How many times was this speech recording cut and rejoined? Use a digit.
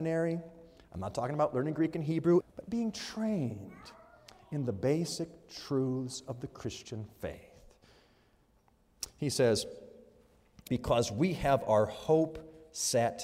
2